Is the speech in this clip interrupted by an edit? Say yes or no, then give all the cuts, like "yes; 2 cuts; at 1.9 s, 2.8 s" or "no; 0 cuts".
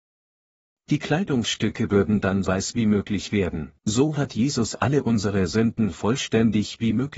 yes; 2 cuts; at 2.4 s, 3.8 s